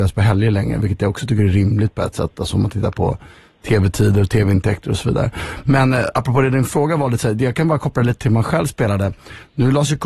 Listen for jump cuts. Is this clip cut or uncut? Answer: uncut